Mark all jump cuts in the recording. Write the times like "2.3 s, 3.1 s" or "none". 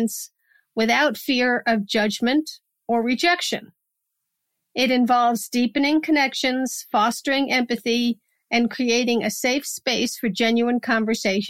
none